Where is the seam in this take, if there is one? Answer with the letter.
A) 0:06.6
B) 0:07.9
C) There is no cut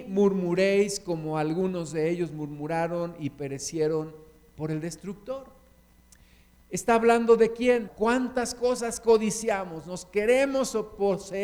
B